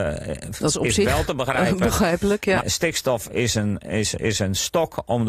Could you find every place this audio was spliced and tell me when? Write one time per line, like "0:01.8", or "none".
0:02.6